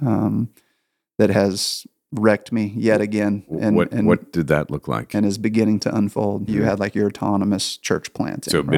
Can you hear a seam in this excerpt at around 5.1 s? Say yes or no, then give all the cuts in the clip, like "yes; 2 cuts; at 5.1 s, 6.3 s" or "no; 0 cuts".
no; 1 cut; at 6.5 s